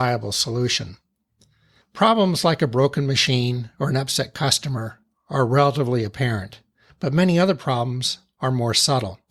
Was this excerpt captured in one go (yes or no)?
yes